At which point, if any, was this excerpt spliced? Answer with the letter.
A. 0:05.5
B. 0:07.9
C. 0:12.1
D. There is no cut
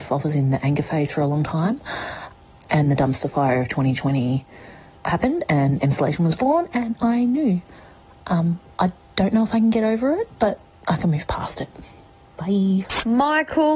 D